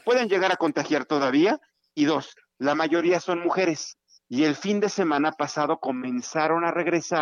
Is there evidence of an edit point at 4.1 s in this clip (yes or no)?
yes